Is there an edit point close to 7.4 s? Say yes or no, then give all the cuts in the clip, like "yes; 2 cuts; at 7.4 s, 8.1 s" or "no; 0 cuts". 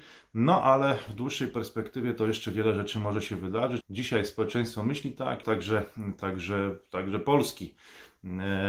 no; 2 cuts; at 3.8 s, 5.4 s